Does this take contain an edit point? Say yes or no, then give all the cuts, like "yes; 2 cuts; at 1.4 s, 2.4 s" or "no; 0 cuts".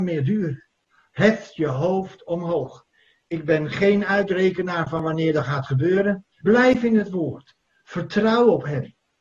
yes; 1 cut; at 6.4 s